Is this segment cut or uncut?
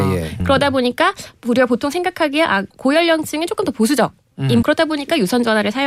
cut